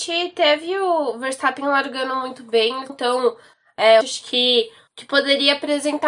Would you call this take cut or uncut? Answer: cut